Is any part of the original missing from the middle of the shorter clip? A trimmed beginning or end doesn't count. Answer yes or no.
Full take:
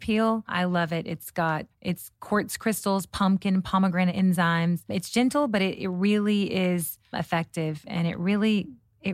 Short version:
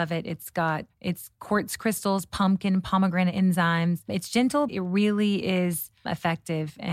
yes